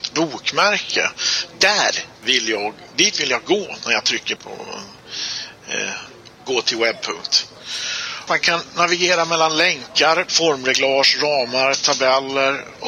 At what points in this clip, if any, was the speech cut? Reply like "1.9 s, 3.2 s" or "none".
4.4 s, 8.3 s, 10.3 s

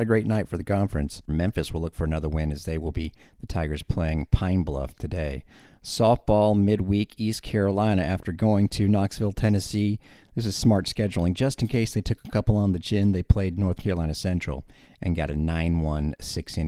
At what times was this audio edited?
1.3 s

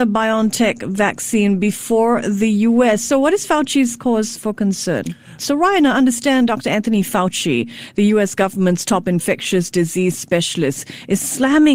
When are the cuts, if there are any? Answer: 5.4 s

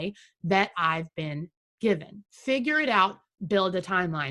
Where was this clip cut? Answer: 2.3 s

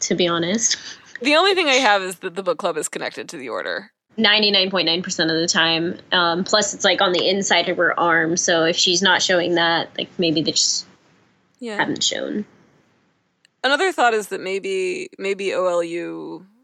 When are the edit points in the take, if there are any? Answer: 4.1 s

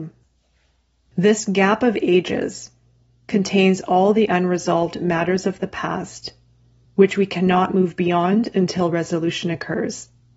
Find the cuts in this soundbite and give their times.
6.9 s

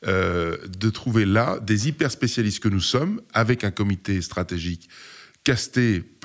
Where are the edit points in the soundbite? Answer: none

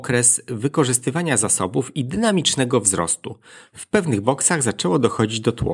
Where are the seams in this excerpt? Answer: 3.7 s

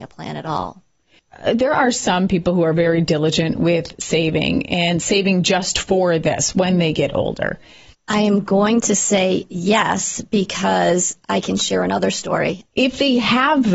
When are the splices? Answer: 7.9 s, 12.7 s

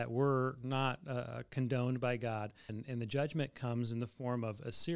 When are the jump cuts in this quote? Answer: 2.7 s

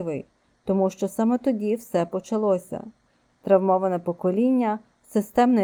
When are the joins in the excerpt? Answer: 3.3 s

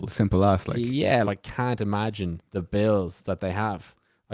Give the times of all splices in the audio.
1.2 s, 2.5 s

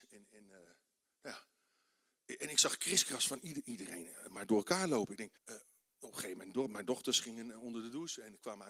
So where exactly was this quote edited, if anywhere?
5.4 s

